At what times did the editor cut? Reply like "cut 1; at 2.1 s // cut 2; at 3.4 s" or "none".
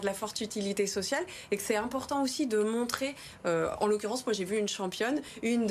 none